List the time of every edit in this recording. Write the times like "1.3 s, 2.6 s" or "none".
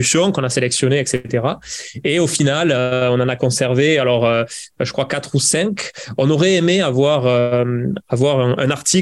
none